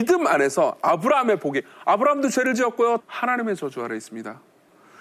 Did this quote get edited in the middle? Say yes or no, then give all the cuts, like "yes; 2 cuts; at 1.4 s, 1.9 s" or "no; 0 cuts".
yes; 1 cut; at 3.0 s